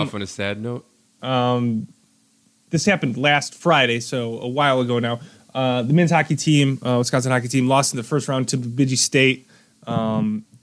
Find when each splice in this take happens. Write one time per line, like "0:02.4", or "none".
0:01.2